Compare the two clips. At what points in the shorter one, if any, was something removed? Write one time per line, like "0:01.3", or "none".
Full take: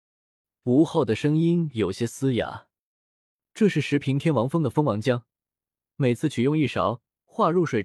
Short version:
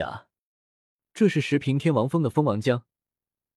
none